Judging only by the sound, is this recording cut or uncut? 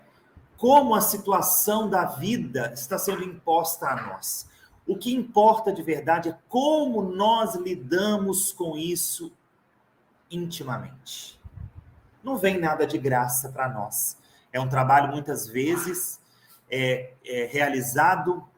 cut